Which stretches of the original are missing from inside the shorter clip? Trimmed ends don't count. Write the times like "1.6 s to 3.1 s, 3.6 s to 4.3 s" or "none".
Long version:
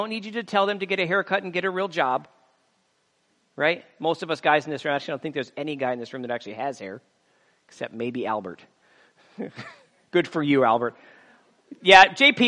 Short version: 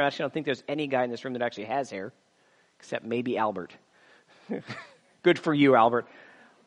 none